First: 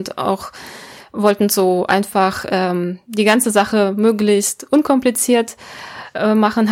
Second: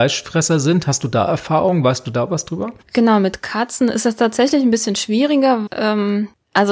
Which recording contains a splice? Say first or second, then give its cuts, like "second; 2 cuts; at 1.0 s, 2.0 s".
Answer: second; 2 cuts; at 2.8 s, 5.7 s